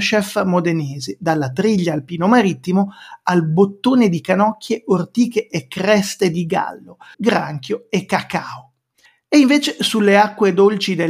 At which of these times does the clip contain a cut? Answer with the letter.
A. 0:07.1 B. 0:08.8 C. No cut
A